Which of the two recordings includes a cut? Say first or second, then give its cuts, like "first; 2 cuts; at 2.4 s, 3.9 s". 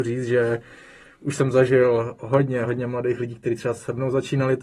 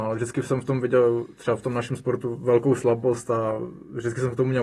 first; 1 cut; at 2.6 s